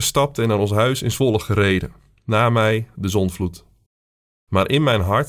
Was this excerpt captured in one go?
yes; 0 cuts

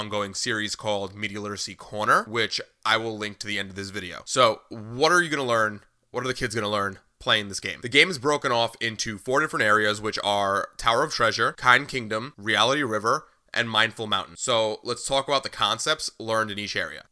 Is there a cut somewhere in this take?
no; 0 cuts

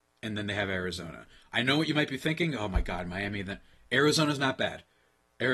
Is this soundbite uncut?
yes; 0 cuts

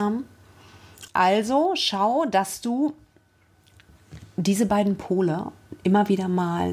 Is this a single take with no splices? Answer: no; 1 cut; at 1.1 s

